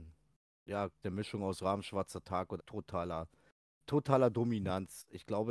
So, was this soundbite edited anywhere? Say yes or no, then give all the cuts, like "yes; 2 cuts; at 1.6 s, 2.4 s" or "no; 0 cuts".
yes; 2 cuts; at 1.0 s, 2.6 s